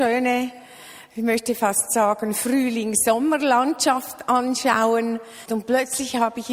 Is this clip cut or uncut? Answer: cut